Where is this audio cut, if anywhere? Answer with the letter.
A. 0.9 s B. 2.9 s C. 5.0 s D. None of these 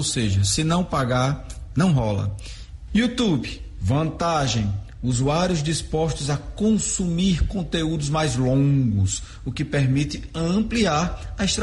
B